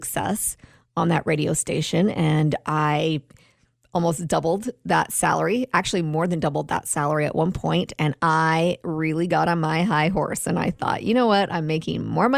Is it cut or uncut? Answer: uncut